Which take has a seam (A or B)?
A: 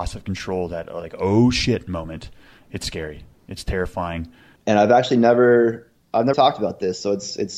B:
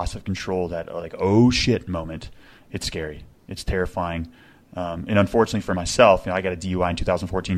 A